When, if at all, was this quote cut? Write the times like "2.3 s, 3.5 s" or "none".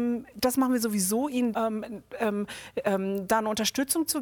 1.5 s